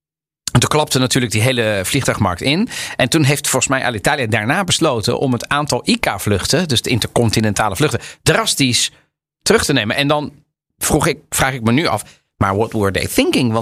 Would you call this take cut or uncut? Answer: uncut